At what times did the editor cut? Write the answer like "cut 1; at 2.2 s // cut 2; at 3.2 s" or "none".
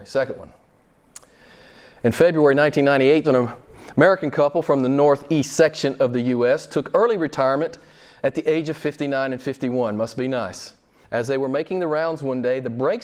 cut 1; at 3.2 s // cut 2; at 11.0 s